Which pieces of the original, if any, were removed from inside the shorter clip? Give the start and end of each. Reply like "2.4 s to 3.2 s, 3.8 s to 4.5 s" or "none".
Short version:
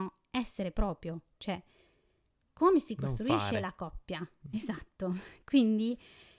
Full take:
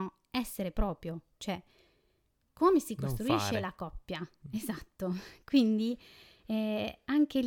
none